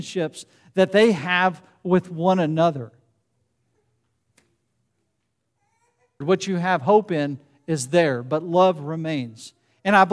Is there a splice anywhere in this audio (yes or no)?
yes